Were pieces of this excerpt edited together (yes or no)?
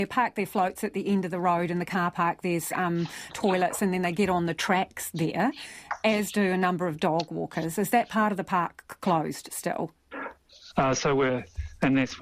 yes